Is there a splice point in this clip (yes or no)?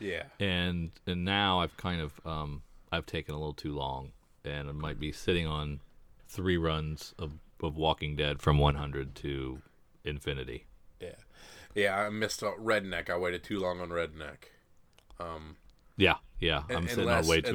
no